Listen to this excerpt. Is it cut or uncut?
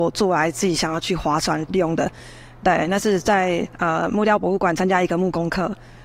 uncut